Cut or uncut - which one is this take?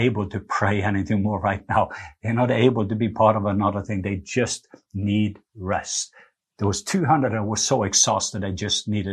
uncut